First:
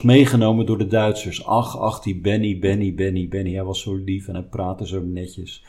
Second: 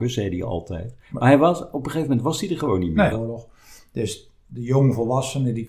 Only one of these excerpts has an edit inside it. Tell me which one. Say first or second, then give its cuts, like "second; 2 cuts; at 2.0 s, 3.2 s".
second; 1 cut; at 3.1 s